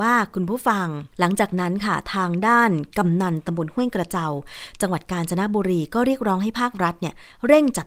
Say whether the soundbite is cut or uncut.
cut